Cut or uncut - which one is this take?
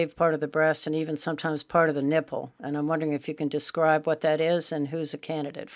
uncut